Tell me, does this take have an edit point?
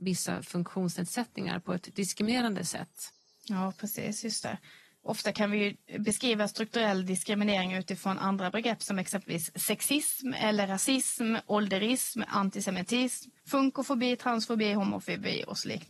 yes; 1 cut; at 13.4 s

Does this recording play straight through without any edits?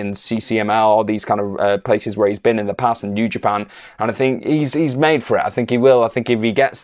yes; 0 cuts

